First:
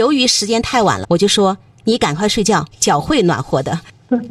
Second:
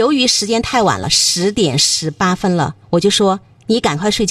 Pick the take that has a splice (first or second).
first